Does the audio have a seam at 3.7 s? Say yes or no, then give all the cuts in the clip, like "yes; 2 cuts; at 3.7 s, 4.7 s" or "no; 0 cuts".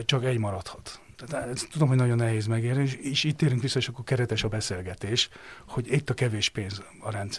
no; 1 cut; at 1.4 s